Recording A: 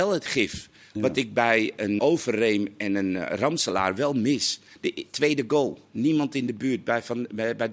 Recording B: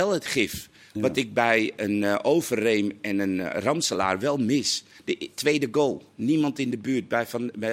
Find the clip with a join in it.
A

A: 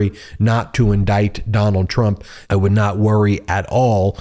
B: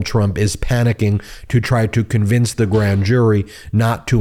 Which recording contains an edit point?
A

